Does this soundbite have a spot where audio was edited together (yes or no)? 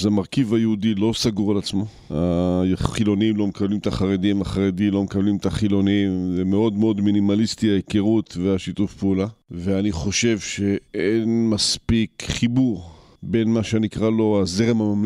no